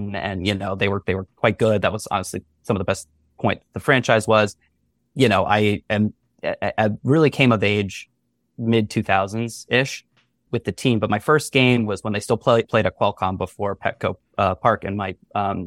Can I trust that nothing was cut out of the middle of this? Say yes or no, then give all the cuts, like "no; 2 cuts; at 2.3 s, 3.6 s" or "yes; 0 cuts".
yes; 0 cuts